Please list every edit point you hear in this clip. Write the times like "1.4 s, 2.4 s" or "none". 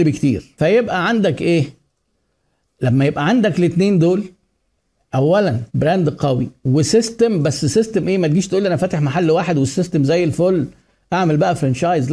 5.7 s